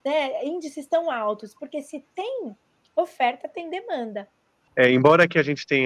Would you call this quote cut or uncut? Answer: cut